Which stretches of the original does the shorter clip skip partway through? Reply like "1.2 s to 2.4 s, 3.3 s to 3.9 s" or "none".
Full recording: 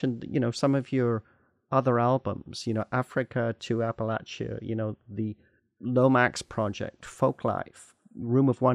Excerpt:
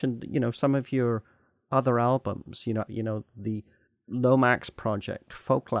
2.9 s to 4.6 s